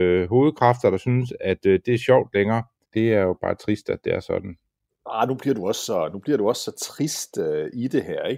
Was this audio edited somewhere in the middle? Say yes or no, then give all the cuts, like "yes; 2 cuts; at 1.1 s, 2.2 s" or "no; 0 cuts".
yes; 1 cut; at 2.9 s